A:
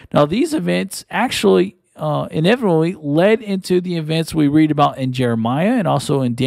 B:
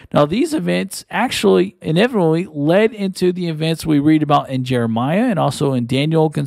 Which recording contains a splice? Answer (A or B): B